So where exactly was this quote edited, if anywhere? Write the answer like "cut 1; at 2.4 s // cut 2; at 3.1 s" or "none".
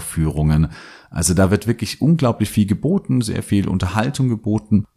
none